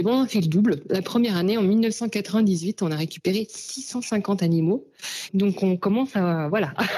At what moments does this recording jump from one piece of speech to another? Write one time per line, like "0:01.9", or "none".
0:05.3